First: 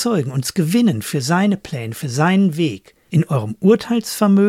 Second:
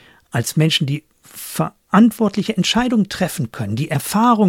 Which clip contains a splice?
first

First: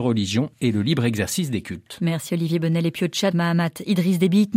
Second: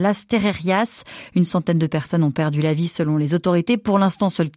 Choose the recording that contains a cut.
first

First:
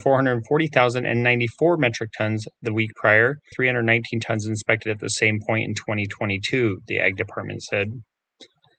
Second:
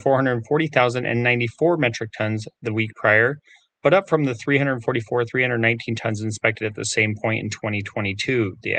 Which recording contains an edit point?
first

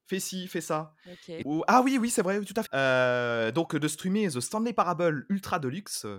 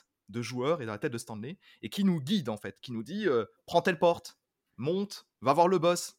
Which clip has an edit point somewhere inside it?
first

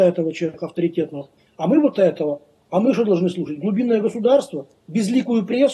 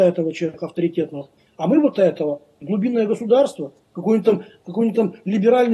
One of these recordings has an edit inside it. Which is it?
second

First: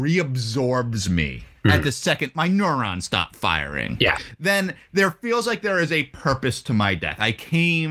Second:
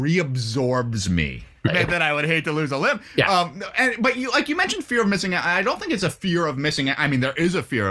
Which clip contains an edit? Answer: second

